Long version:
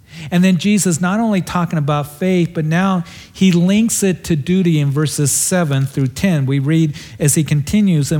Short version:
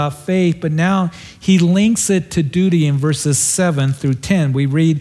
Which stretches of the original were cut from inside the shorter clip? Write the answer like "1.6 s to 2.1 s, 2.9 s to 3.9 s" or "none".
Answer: none